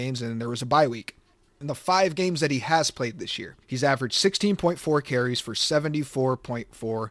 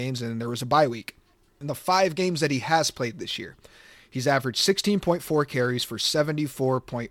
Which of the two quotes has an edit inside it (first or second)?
first